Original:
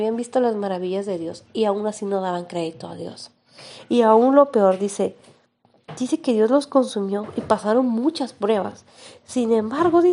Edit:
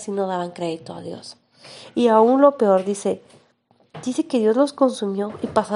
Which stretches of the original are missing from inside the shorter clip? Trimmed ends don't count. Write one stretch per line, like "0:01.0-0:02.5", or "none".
none